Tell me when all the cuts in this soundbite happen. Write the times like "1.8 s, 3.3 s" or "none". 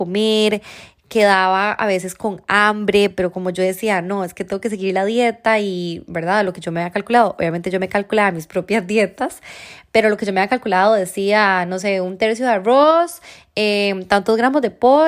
none